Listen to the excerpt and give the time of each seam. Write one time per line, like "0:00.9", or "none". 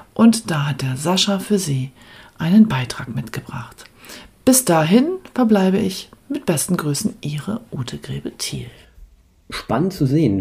none